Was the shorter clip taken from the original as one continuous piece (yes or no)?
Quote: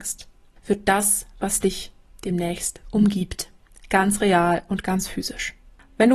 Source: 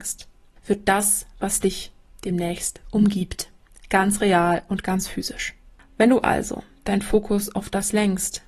yes